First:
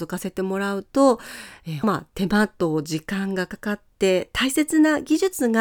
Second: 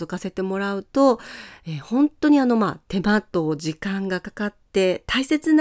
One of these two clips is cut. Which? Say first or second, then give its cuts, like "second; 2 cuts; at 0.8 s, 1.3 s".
first; 1 cut; at 1.8 s